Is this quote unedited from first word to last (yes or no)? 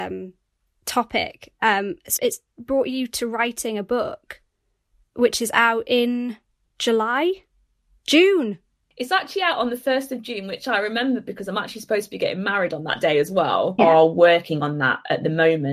no